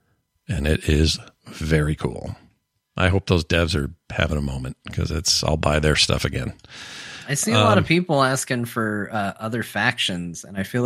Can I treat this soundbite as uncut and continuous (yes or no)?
yes